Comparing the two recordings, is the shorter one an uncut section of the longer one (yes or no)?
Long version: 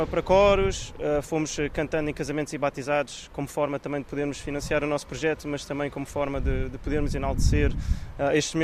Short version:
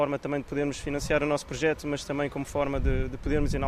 yes